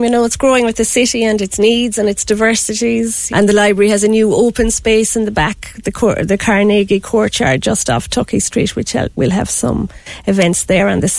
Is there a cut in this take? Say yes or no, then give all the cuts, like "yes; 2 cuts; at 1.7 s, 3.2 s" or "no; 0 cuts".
yes; 1 cut; at 3.3 s